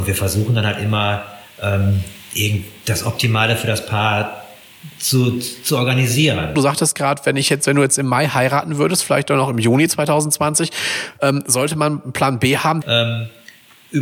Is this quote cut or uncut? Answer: cut